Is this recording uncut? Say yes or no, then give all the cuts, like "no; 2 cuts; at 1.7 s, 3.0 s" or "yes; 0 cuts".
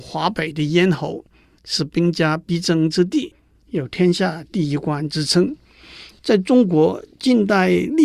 yes; 0 cuts